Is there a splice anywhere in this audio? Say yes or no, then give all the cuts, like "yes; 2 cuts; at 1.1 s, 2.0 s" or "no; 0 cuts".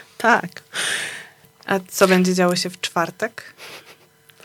yes; 1 cut; at 1.4 s